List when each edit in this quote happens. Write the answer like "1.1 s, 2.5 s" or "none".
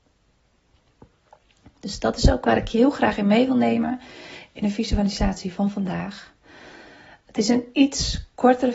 none